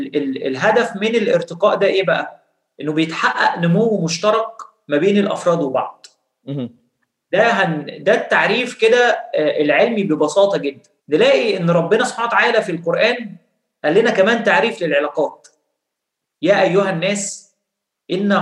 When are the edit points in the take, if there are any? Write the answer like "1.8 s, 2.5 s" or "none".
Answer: 11.0 s